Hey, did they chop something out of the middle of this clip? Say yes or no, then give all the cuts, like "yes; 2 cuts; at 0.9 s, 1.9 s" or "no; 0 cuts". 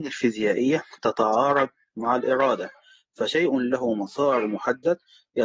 no; 0 cuts